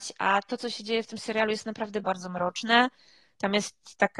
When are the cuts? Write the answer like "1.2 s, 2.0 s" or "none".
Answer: 2.0 s